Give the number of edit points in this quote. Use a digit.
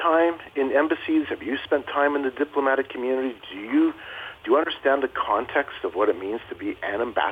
0